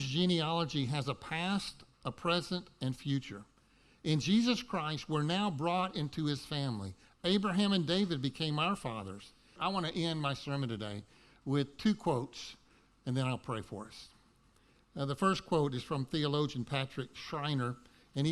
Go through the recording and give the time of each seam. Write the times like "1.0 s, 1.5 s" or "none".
9.6 s